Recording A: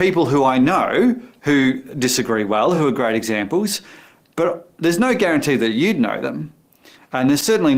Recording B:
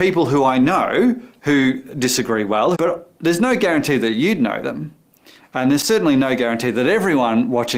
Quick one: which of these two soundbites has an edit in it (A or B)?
B